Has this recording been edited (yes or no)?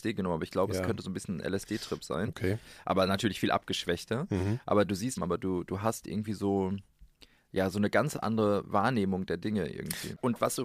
yes